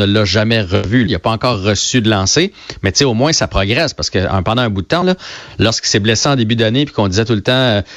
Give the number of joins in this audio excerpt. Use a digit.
2